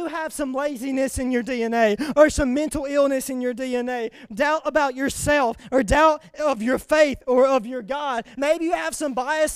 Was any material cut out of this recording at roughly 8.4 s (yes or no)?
yes